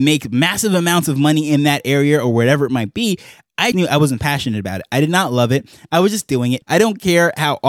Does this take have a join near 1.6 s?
no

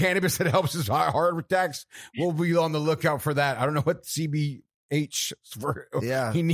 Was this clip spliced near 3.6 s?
no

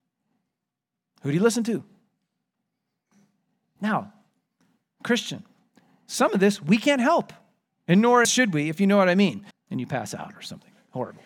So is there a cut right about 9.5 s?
yes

